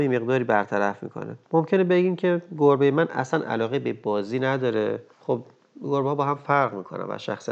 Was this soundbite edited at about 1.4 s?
yes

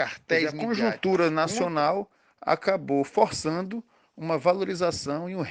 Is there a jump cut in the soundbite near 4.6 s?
no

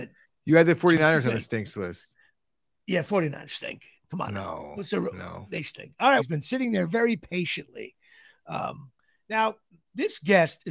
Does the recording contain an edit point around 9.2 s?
no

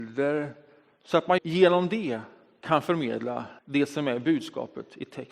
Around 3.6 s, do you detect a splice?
yes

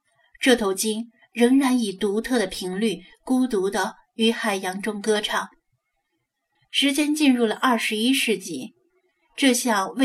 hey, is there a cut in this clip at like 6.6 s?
yes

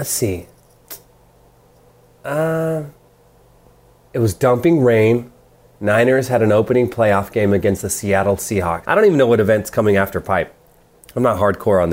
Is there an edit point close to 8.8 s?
yes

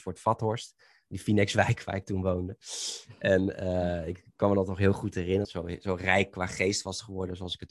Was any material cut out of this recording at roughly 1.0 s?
no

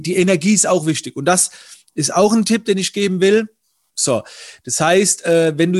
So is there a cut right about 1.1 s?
no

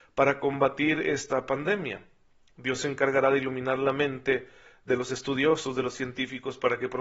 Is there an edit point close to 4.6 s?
no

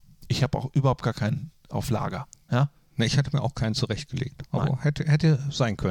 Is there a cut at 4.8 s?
no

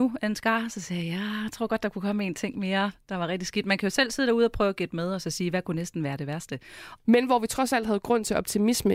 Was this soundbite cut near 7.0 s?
yes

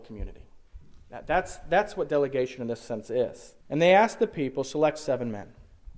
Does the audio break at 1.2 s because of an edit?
no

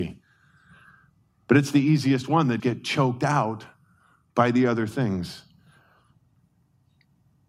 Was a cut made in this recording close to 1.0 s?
no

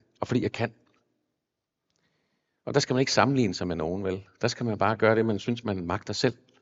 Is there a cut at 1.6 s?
no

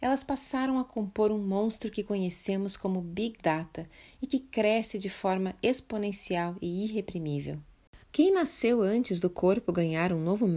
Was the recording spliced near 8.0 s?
yes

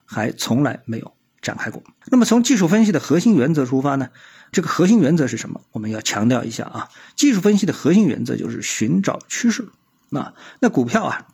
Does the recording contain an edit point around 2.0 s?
yes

